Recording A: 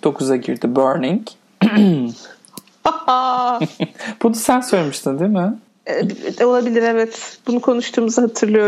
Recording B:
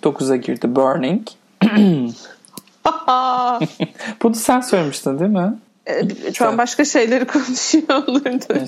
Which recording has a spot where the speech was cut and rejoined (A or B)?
B